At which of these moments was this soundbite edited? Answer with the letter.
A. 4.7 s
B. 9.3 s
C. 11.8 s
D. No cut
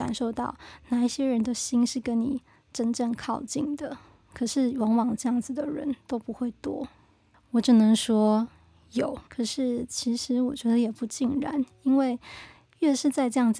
B